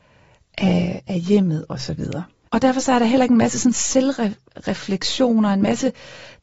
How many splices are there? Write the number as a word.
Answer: one